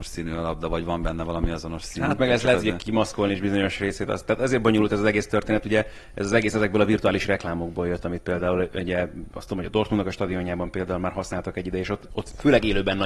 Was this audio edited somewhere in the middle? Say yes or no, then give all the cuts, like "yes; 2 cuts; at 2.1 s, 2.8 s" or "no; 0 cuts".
no; 0 cuts